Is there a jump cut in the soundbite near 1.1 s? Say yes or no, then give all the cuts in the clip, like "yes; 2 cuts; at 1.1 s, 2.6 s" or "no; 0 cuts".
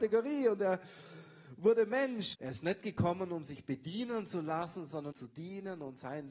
no; 2 cuts; at 2.3 s, 5.1 s